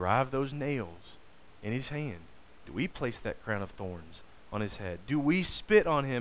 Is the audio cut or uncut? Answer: uncut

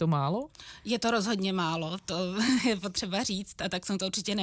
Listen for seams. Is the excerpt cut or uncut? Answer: uncut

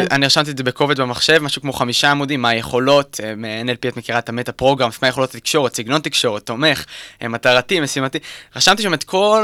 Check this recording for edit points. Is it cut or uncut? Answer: uncut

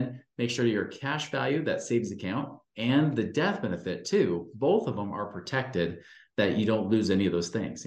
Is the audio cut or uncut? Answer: uncut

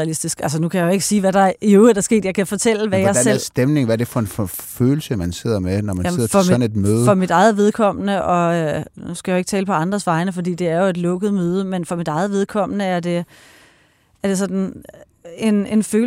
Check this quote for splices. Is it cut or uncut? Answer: uncut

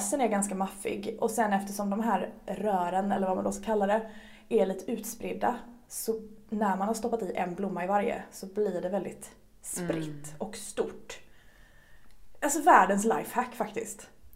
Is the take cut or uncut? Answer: uncut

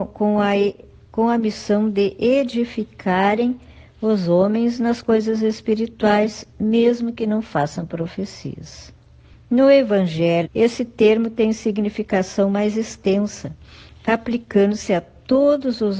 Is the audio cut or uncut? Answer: cut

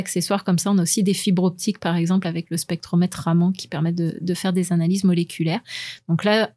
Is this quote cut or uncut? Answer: uncut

